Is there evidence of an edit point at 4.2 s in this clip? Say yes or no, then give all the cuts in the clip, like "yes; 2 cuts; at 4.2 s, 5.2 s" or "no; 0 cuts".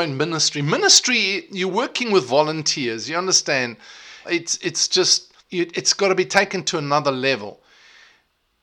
yes; 2 cuts; at 4.2 s, 5.4 s